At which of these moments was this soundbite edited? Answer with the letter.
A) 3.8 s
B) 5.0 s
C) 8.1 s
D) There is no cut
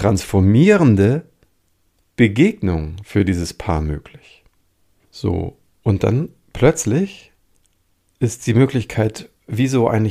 B